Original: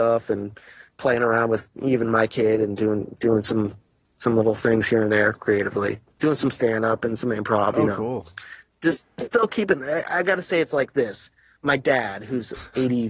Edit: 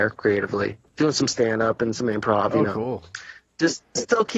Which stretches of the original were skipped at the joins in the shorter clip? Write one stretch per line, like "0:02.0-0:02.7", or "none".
none